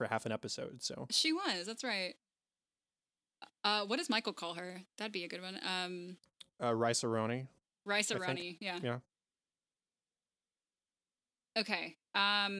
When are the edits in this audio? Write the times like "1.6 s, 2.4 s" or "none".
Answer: none